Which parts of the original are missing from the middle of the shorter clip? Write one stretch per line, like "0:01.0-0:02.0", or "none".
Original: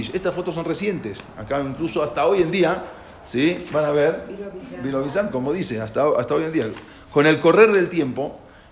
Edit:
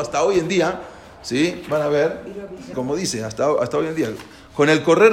0:04.8-0:05.3